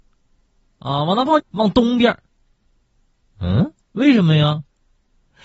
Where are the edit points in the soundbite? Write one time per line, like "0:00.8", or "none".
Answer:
0:01.4
0:03.8

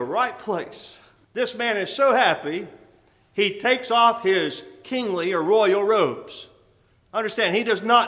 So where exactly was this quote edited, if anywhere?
0:01.2

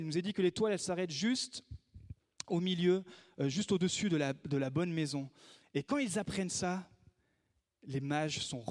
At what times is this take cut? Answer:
none

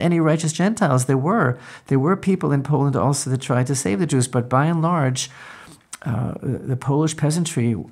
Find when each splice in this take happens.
none

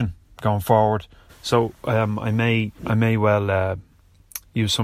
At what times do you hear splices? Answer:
0:01.3
0:02.8

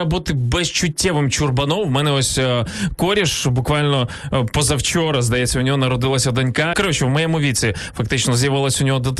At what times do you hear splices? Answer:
0:06.7

